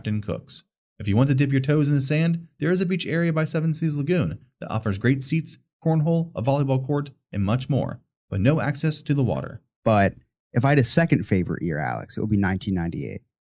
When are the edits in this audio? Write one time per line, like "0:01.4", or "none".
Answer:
0:09.8

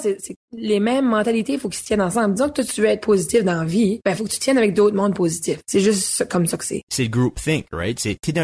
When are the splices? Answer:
0:05.6

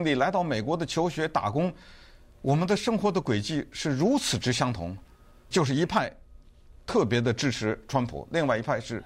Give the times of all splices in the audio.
0:05.5

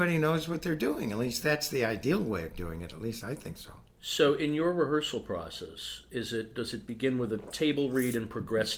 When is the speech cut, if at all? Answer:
none

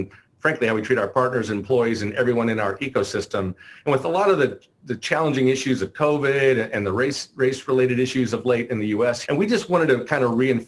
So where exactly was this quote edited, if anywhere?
0:09.2

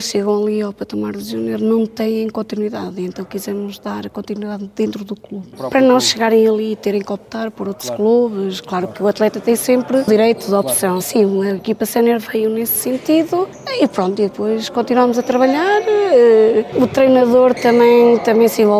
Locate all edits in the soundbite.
0:11.0

